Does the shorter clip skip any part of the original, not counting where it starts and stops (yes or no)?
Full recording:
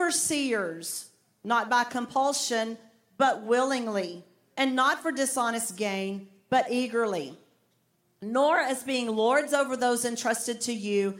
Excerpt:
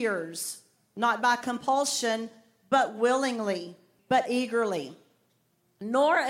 yes